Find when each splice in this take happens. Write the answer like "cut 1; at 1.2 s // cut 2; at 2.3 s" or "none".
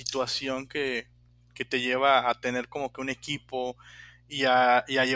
none